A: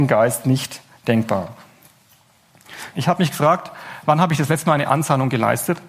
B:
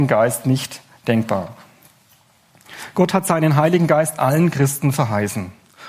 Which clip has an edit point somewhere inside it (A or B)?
A